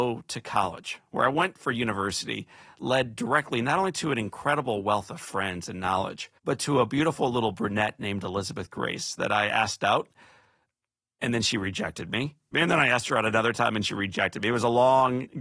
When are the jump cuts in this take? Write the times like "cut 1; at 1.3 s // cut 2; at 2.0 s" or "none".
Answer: cut 1; at 6.4 s // cut 2; at 12.5 s